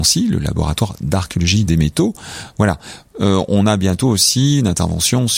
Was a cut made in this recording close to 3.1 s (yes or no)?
no